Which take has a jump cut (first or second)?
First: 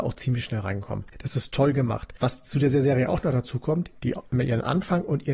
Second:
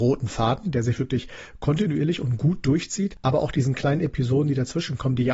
first